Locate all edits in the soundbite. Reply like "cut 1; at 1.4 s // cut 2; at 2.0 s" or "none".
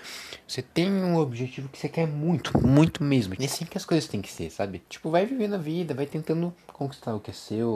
cut 1; at 3.4 s // cut 2; at 4.9 s